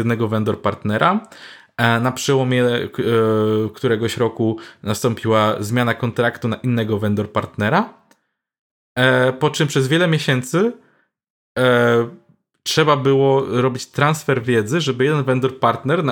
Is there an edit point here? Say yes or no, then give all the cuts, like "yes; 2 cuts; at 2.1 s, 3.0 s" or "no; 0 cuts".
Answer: no; 0 cuts